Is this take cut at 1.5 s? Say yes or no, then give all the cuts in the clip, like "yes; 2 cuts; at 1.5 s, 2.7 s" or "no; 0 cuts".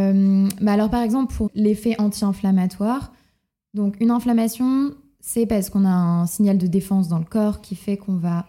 yes; 1 cut; at 1.5 s